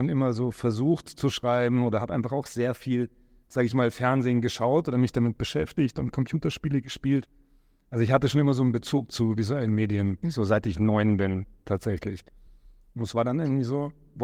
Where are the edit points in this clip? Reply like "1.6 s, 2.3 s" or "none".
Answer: none